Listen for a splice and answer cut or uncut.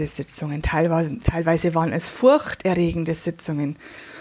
uncut